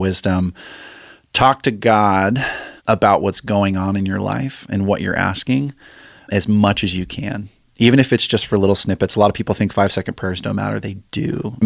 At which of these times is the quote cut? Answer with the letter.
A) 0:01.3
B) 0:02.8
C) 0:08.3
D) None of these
B